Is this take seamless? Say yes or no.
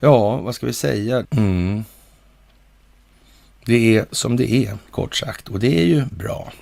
no